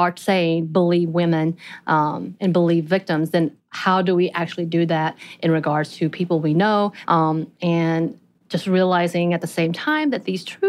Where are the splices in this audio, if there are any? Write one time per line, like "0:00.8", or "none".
0:07.0

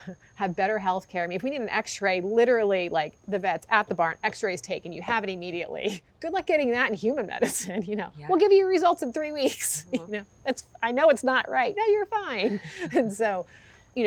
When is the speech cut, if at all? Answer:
none

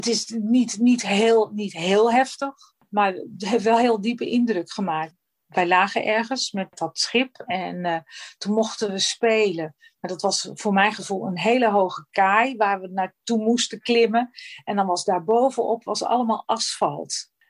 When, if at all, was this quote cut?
none

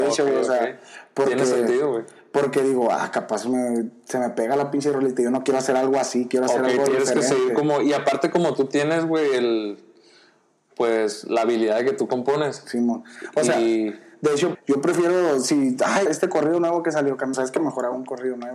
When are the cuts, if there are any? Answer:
0:14.5
0:16.1
0:17.3

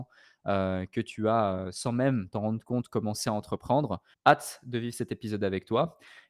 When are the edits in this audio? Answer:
0:04.1

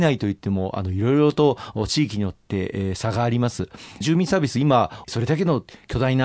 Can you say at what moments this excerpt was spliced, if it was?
0:04.0
0:05.0

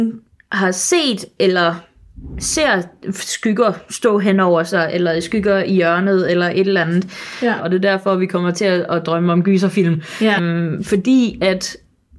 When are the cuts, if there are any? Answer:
0:07.6
0:10.4

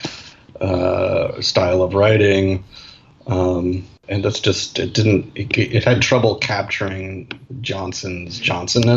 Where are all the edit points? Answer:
0:04.0

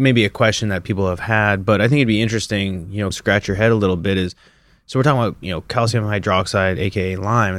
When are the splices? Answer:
0:03.1

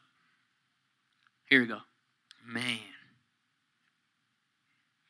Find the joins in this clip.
0:02.2

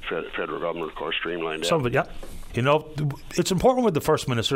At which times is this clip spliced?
0:02.5

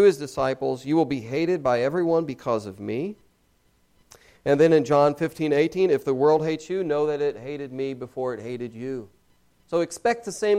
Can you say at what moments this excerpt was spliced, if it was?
none

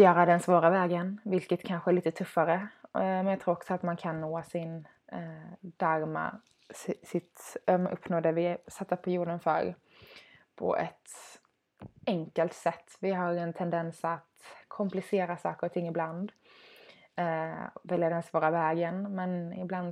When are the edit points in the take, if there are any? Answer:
none

